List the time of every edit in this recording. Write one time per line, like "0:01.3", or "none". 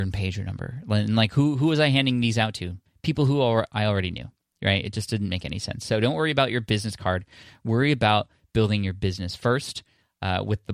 none

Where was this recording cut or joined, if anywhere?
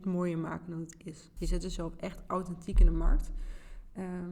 0:01.4

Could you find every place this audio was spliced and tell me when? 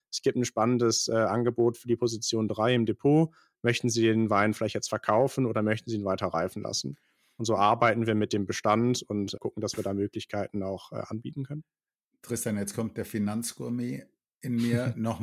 0:09.4

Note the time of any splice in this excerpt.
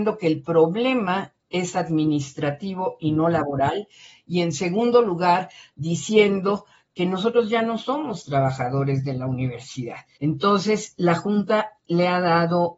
0:10.2

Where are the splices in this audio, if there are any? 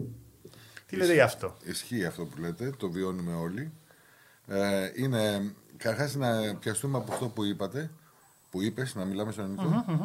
none

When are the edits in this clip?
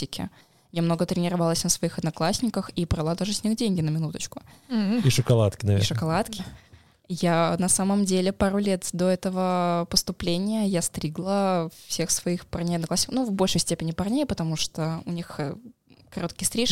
0:06.4

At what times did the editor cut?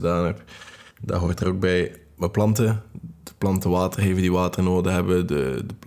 0:00.9

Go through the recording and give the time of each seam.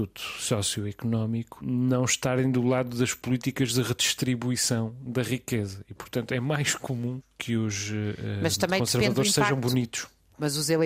none

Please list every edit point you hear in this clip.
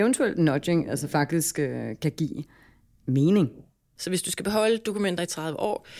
0:04.0

